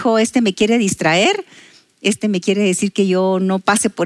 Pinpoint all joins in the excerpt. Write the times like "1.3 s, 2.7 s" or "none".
none